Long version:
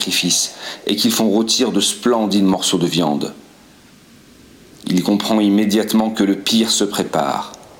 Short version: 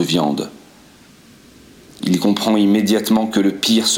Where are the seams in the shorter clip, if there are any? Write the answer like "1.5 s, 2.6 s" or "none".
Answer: none